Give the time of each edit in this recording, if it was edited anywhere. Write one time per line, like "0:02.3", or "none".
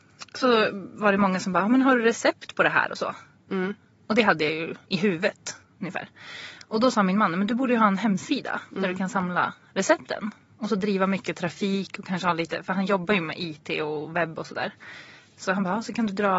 0:05.6